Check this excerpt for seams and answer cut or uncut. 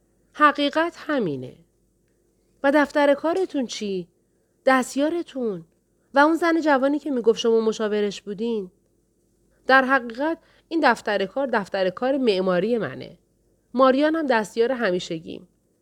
cut